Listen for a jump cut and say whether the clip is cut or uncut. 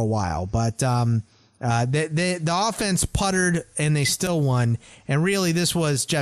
uncut